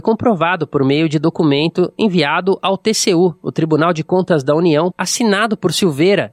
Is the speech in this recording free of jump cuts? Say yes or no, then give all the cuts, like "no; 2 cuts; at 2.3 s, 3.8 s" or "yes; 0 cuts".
no; 1 cut; at 4.9 s